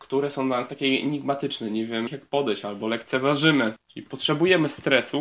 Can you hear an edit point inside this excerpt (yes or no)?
yes